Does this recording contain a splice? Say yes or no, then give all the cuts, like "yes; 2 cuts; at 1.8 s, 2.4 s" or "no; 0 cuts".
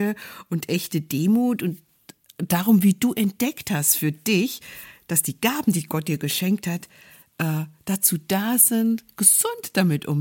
no; 0 cuts